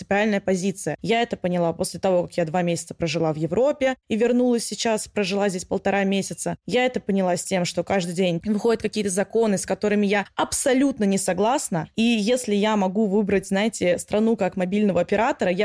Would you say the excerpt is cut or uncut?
uncut